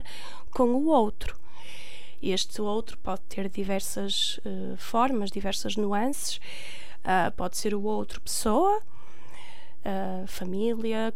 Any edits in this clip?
no; 0 cuts

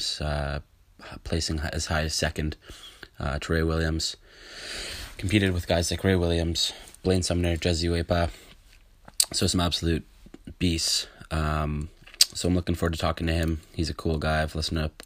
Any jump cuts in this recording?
no; 0 cuts

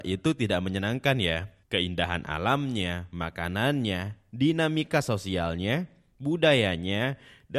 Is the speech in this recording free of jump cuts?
no; 1 cut; at 1.6 s

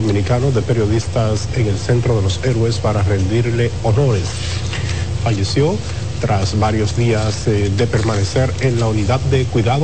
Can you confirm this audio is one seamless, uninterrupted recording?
no; 1 cut; at 5.2 s

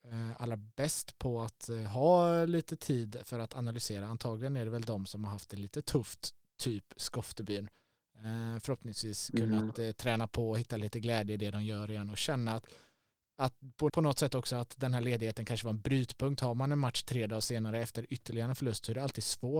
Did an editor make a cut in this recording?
yes; 1 cut; at 13.9 s

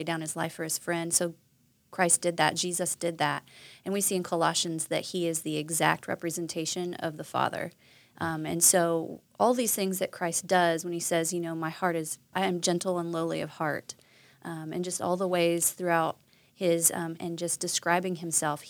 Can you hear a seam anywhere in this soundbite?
yes; 2 cuts; at 12.3 s, 17.2 s

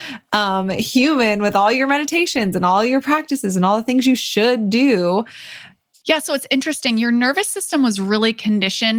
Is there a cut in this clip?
yes; 1 cut; at 6.0 s

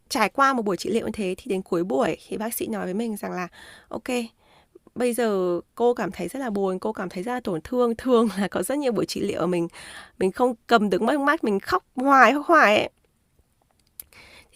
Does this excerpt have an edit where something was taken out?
no; 0 cuts

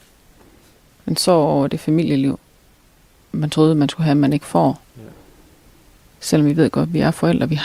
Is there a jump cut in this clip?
no; 0 cuts

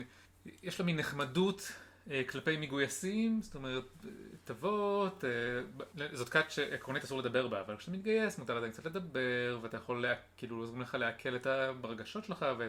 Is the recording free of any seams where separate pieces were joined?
yes; 0 cuts

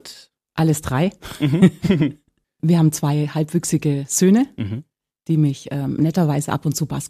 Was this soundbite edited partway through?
no; 0 cuts

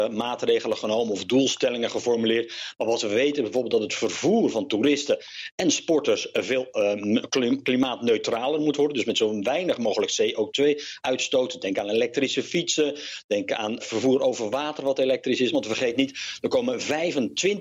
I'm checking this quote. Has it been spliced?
yes; 2 cuts; at 13.8 s, 15.5 s

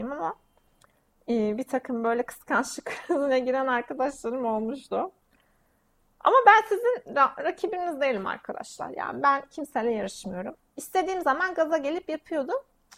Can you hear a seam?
yes; 1 cut; at 10.6 s

